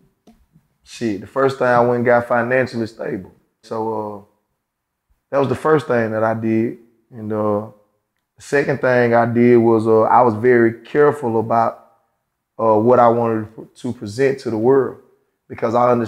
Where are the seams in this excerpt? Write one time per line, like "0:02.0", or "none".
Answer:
0:03.6